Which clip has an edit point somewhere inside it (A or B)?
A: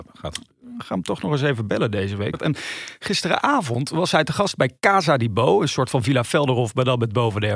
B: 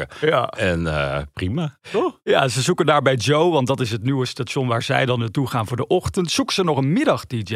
A